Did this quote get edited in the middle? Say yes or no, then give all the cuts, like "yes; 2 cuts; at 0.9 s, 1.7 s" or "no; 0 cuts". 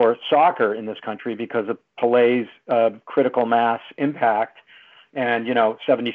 no; 0 cuts